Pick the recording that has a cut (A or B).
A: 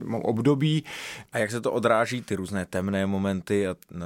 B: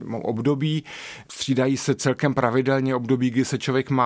A